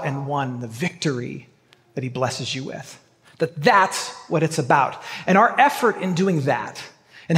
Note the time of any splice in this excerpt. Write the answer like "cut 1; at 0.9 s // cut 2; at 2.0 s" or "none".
none